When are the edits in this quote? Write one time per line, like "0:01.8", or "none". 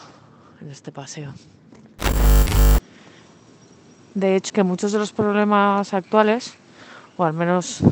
0:04.5

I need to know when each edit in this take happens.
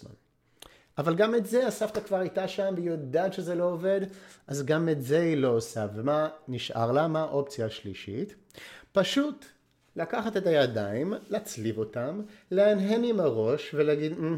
none

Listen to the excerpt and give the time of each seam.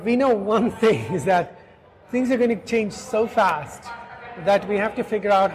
none

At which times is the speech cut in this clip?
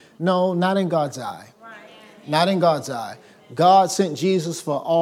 none

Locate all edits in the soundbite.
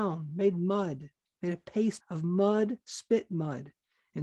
0:02.0

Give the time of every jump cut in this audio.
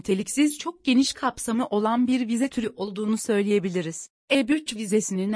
0:04.2

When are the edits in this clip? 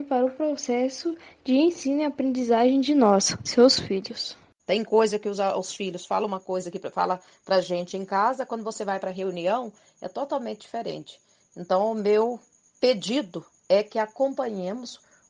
0:04.6

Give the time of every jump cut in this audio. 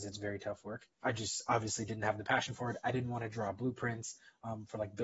0:00.9

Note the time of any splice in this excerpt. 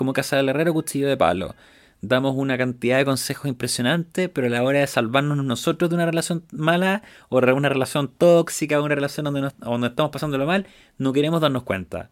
none

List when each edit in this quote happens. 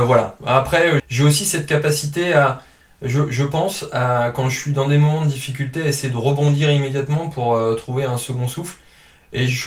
0:01.0

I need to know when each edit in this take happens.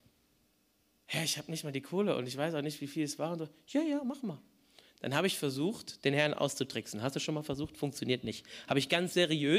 none

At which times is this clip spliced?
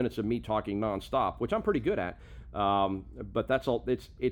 none

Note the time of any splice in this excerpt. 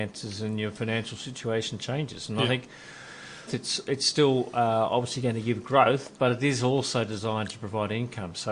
0:03.5

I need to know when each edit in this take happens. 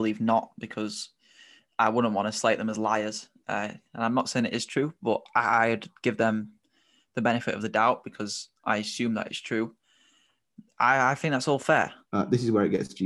0:12.0

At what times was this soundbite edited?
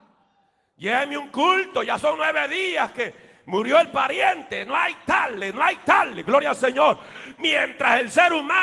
none

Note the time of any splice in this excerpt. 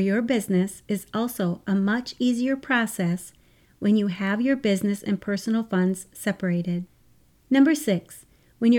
none

